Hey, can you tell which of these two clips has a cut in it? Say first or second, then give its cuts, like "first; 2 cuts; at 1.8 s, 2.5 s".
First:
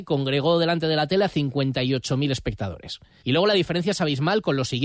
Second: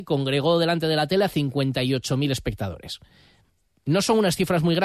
first; 1 cut; at 3.2 s